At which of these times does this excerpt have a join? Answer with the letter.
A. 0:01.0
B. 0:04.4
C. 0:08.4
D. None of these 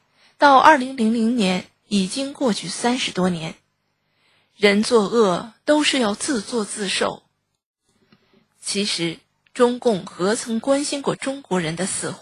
D